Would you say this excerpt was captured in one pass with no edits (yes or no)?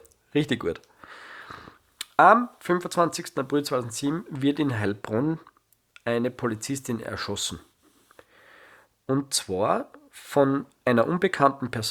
yes